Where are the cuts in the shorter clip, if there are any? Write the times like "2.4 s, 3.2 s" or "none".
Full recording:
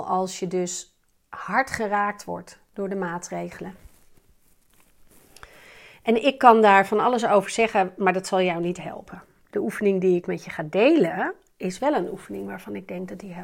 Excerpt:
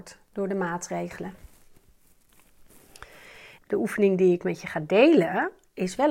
3.6 s